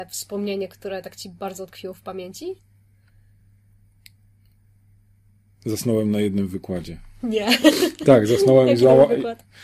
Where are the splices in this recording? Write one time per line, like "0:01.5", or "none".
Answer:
none